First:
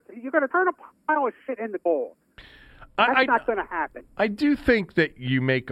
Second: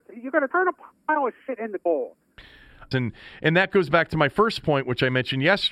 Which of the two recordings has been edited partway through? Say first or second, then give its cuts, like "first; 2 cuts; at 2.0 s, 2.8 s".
second; 1 cut; at 2.9 s